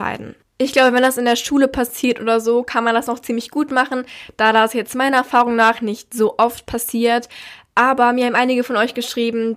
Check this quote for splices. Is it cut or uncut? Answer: uncut